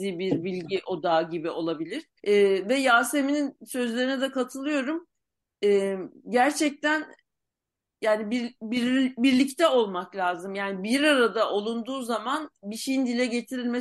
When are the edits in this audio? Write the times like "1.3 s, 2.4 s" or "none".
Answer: 2.2 s